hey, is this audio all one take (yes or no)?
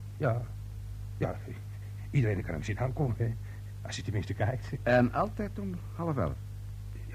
yes